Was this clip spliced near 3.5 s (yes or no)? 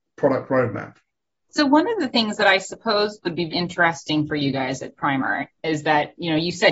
yes